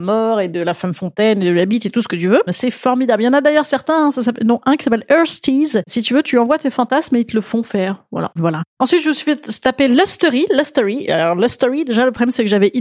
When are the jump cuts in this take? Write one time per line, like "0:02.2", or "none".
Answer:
0:02.5
0:08.4